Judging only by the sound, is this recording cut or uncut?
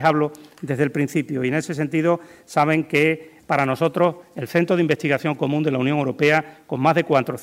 uncut